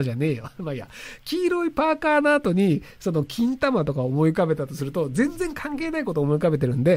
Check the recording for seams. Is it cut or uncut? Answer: uncut